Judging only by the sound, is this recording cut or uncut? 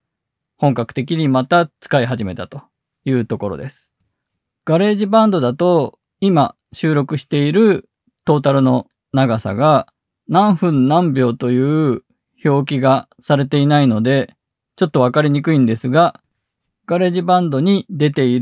uncut